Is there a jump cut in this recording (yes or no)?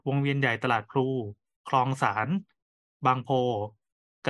no